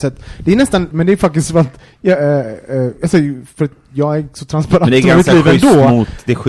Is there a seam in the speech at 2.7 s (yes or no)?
no